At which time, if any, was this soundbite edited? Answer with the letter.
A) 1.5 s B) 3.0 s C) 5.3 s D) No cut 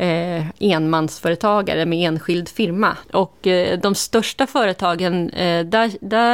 B